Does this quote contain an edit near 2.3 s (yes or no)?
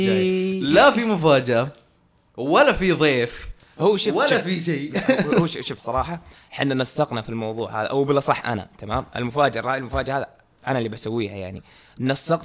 no